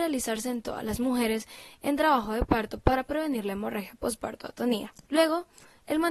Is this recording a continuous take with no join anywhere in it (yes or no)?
no